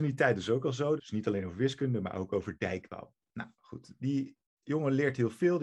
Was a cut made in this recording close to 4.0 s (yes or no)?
yes